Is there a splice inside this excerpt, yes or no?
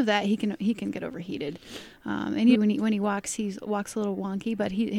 yes